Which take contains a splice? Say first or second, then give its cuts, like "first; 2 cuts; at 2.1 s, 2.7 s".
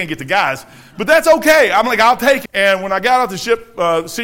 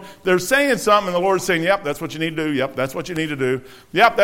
first; 1 cut; at 2.5 s